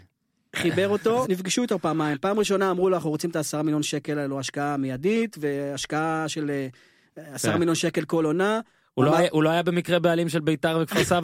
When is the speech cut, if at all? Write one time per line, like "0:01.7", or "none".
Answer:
0:01.2